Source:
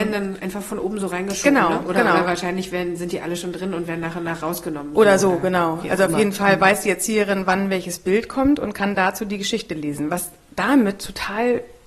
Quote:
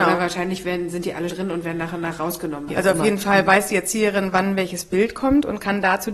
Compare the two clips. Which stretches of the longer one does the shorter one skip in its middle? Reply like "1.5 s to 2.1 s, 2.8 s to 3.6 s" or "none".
3.4 s to 3.5 s, 4.9 s to 5.8 s